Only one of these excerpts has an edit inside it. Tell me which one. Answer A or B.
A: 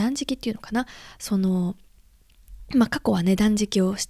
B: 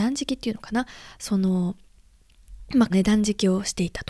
B